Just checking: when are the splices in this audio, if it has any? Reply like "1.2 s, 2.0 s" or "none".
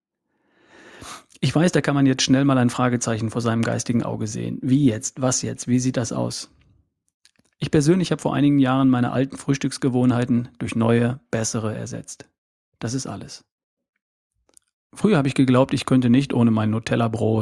7.4 s